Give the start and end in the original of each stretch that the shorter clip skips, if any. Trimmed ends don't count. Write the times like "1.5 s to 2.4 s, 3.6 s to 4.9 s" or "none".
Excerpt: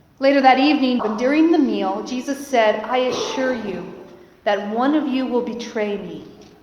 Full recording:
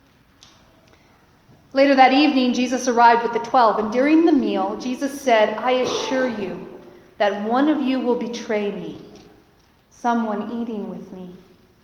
2.5 s to 3.7 s